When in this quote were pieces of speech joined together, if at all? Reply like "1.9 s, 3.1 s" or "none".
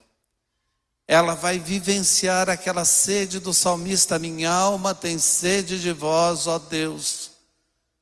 none

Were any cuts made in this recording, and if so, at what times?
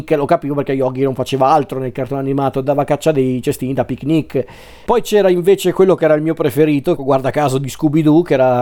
4.9 s, 7.0 s

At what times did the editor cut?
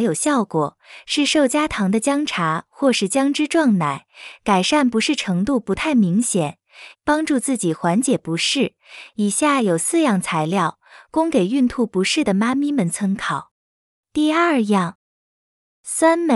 6.9 s, 14.0 s

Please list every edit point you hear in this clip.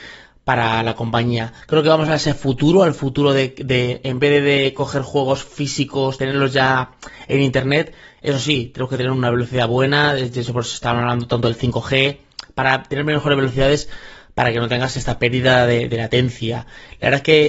none

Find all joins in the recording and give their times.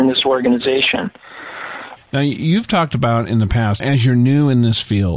2.0 s, 3.8 s

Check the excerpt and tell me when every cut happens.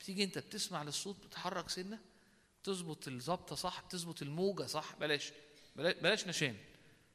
none

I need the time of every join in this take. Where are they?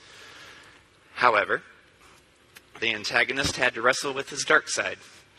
2.8 s

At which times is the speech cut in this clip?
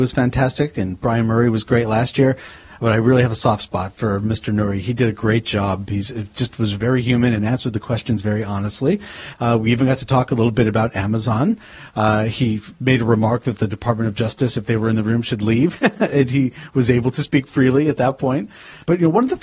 9.3 s

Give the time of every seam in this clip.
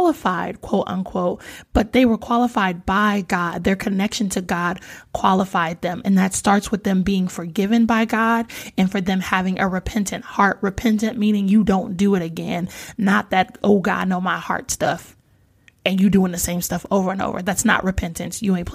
none

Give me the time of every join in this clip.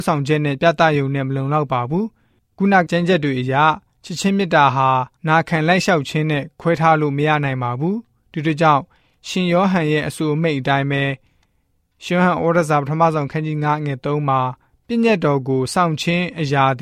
2.9 s, 5.2 s

